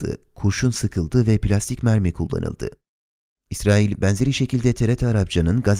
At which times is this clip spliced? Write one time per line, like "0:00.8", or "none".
0:03.4